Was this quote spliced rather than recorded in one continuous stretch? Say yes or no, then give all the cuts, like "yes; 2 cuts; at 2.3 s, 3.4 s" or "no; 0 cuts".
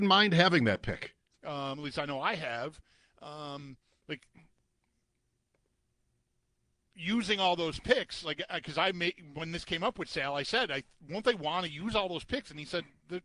yes; 1 cut; at 1.3 s